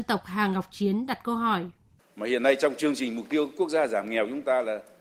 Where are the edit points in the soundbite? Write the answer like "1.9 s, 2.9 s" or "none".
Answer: 2.0 s